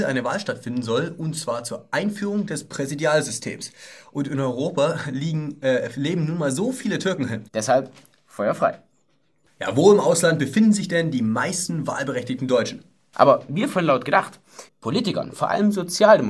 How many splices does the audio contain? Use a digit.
3